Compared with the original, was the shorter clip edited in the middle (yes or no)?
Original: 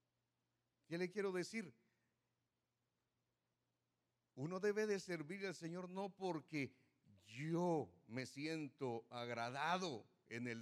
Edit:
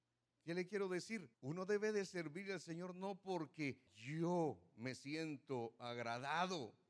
yes